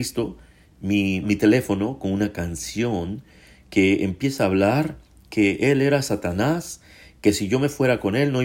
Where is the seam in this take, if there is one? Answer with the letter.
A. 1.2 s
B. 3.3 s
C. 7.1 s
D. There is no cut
A